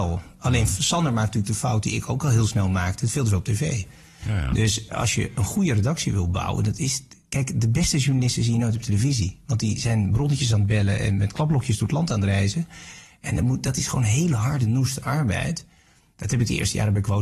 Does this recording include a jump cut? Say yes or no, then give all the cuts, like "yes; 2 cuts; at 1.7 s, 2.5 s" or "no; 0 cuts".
yes; 1 cut; at 4.9 s